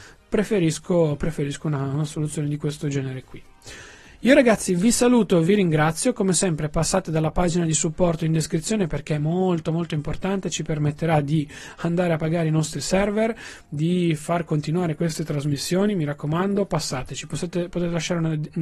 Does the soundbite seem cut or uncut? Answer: uncut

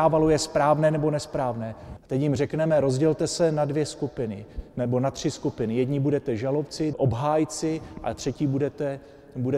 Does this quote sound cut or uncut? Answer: cut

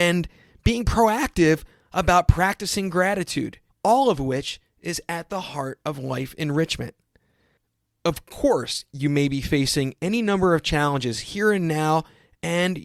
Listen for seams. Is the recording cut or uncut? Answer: cut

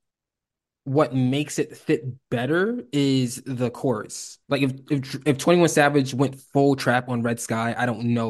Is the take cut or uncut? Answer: cut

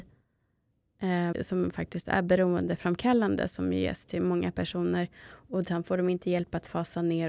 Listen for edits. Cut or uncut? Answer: cut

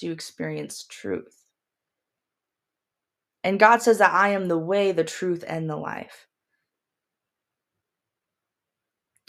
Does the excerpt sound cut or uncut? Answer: uncut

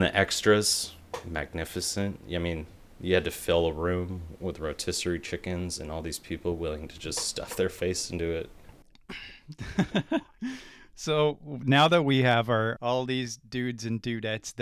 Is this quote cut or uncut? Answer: cut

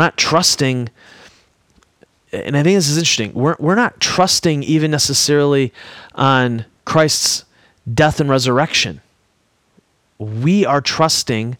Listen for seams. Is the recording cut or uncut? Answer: uncut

